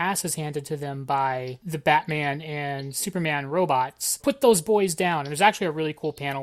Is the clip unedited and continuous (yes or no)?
no